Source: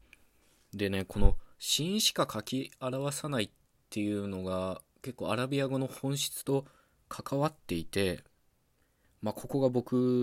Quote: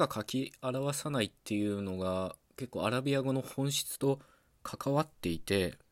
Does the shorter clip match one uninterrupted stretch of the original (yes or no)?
no